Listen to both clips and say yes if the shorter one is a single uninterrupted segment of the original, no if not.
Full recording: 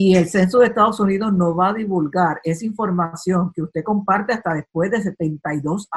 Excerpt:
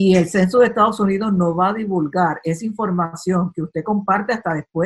yes